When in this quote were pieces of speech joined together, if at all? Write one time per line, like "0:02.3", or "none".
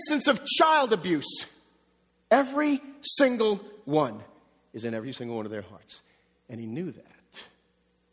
none